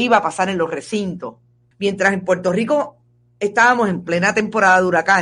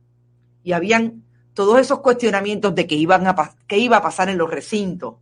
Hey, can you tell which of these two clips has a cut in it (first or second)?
first